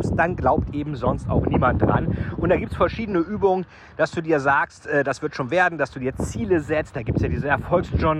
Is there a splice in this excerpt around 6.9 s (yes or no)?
no